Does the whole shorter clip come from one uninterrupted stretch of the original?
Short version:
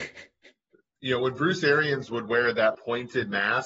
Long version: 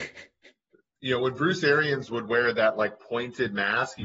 no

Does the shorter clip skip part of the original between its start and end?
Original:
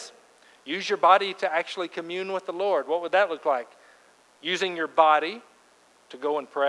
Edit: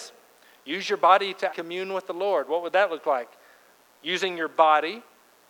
yes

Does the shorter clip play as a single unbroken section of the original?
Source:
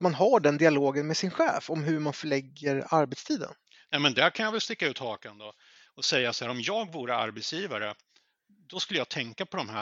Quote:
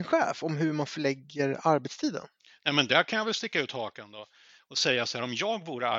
yes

